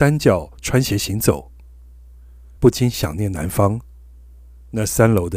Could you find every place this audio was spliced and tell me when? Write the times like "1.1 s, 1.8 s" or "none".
2.6 s